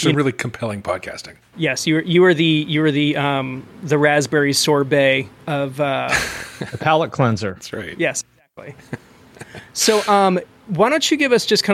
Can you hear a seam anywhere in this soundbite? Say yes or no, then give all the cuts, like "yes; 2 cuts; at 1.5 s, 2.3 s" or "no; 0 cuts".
yes; 1 cut; at 1.5 s